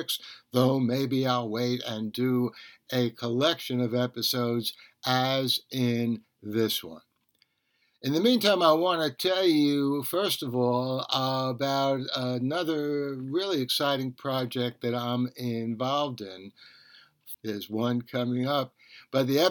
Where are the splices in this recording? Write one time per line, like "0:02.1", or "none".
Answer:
0:17.3